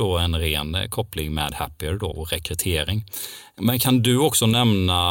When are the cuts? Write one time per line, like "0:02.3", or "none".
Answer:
0:02.1

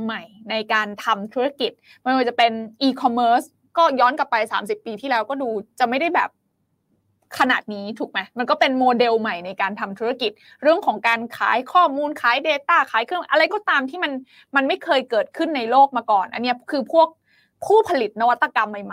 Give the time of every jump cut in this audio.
none

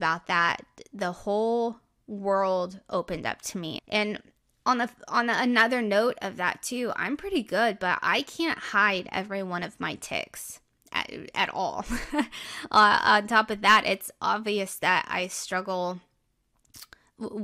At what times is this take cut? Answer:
0:03.8

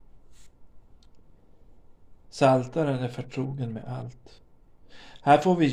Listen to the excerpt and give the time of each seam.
0:02.2

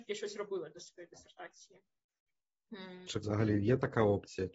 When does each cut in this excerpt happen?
0:03.0

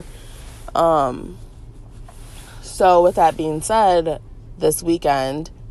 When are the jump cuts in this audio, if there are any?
0:04.6

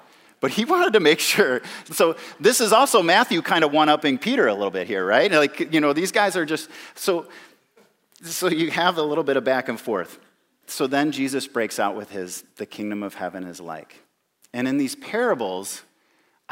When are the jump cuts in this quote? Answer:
none

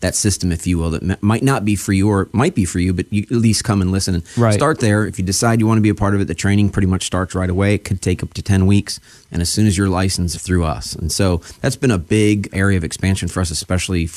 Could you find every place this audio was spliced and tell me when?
0:09.2
0:10.3
0:12.5

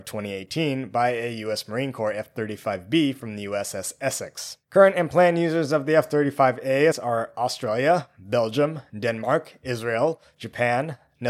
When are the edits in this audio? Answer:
0:04.6
0:06.9

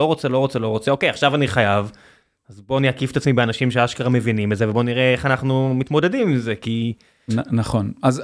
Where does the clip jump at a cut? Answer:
0:07.3

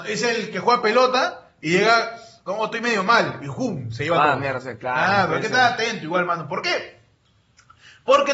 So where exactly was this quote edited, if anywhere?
none

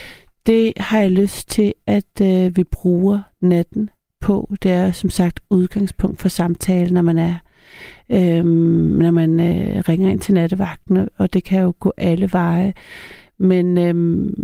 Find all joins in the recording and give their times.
none

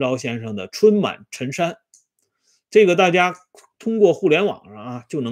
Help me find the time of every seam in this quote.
none

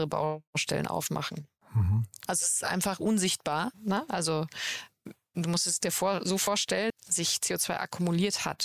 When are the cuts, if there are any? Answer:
0:02.3
0:03.7
0:06.9

